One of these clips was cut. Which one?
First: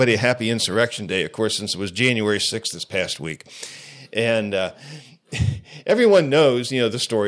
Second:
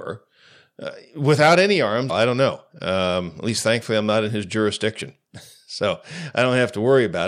second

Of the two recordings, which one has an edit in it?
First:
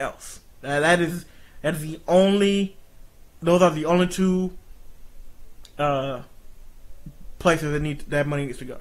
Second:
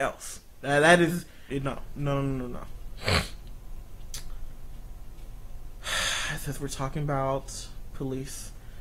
second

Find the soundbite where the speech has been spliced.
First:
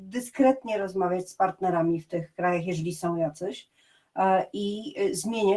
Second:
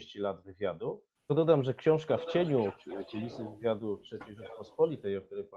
second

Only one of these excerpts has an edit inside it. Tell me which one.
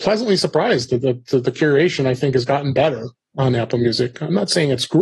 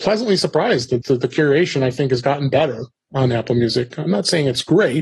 second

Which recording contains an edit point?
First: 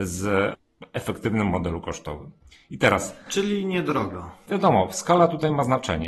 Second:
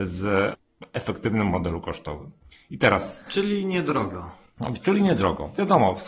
first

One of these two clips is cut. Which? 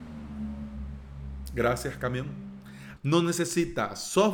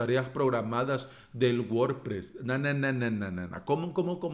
first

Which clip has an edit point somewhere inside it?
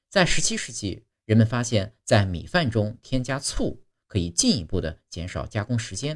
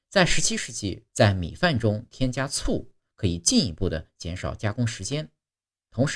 second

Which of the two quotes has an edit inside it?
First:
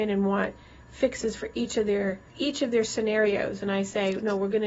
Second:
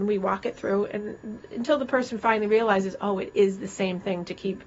first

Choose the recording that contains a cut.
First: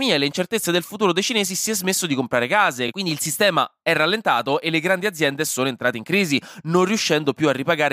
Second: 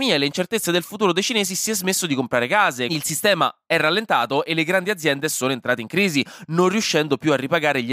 second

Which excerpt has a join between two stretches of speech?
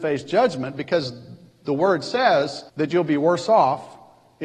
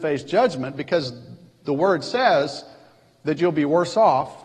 first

